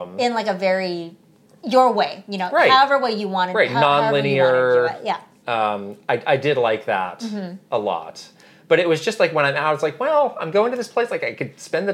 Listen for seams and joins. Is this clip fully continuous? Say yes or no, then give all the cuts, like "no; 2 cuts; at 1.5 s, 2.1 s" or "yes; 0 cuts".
yes; 0 cuts